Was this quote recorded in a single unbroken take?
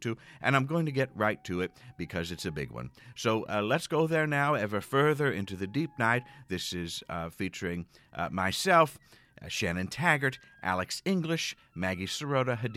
yes; 0 cuts

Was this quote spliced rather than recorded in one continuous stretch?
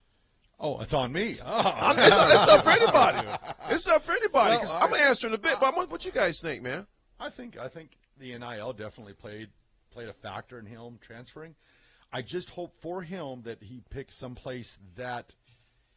no; 0 cuts

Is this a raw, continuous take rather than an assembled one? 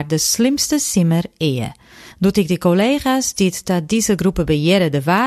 yes; 0 cuts

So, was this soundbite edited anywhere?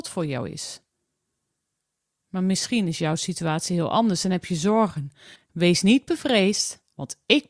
yes; 1 cut; at 5.3 s

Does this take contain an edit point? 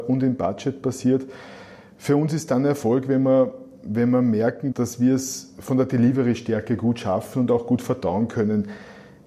yes; 1 cut; at 4.7 s

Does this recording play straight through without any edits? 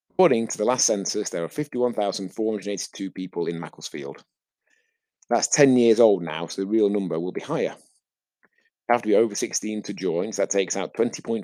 yes; 0 cuts

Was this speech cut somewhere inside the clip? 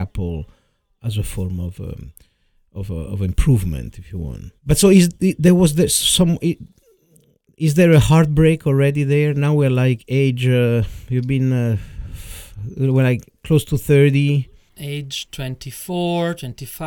yes; 1 cut; at 4.6 s

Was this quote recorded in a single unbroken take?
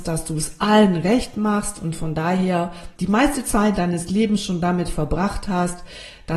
no; 1 cut; at 3.0 s

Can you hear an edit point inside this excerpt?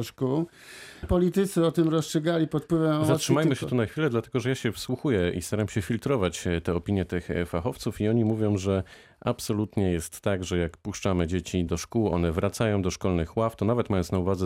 yes; 2 cuts; at 1.0 s, 11.7 s

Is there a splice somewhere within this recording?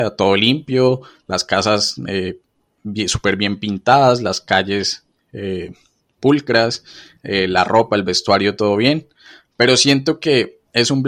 no; 0 cuts

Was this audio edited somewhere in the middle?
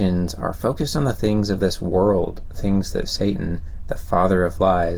no; 0 cuts

